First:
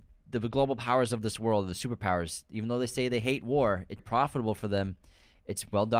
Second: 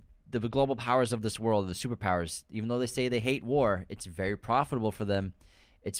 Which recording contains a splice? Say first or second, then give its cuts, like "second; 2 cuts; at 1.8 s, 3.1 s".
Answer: first; 1 cut; at 4.0 s